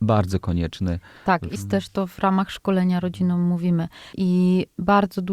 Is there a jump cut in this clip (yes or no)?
yes